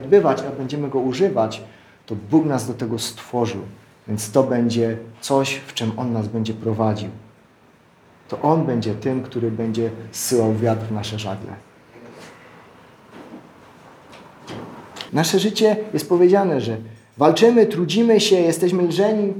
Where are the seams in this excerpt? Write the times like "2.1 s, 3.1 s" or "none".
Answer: 15.1 s